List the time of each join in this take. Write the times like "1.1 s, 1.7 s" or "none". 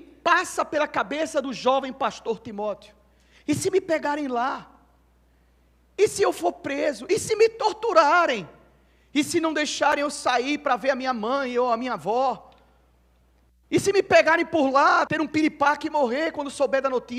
15.1 s